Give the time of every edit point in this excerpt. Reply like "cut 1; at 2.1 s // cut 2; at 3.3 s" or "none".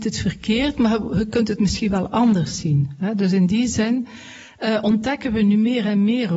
none